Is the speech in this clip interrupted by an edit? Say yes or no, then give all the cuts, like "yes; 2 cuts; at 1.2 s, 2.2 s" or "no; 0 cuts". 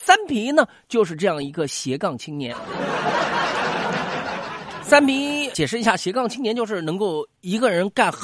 yes; 1 cut; at 5.5 s